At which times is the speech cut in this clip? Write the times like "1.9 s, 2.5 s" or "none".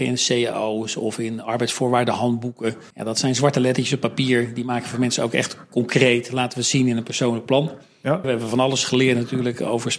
2.9 s, 8.2 s